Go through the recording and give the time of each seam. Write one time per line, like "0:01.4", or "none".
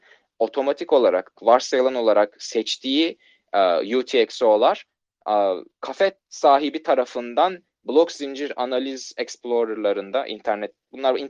0:01.4